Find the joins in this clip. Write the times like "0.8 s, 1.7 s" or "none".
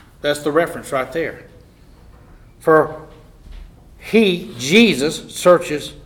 none